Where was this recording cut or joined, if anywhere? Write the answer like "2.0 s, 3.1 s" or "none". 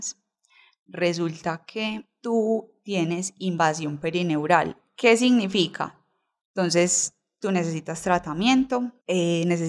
6.4 s

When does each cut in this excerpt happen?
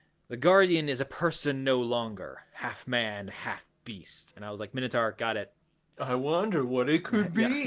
none

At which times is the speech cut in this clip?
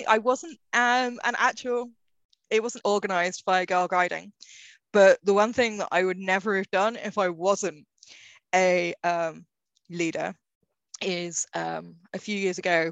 2.8 s

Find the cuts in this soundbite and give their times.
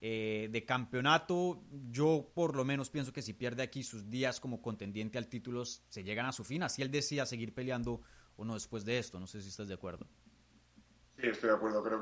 none

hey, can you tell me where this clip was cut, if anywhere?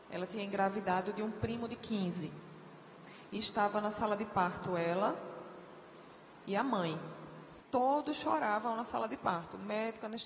7.6 s

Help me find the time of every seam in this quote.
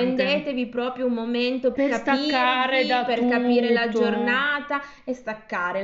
1.7 s

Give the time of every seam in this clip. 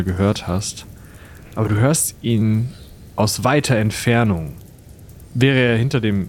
none

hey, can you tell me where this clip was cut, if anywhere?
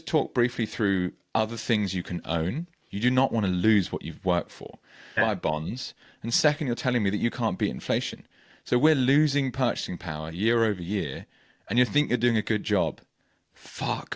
2.9 s, 5.2 s

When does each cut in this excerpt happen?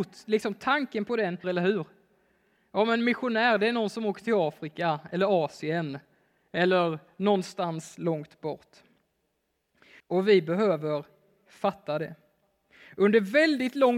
1.4 s, 10.0 s

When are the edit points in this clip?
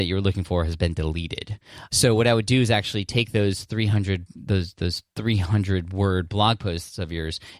1.9 s, 4.3 s

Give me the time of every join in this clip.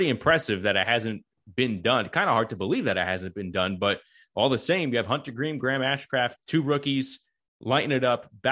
6.4 s

